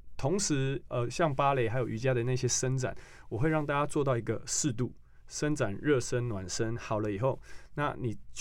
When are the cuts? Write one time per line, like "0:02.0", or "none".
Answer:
none